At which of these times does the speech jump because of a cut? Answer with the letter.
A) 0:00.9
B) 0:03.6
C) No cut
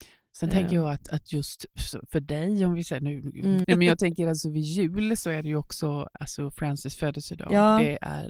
B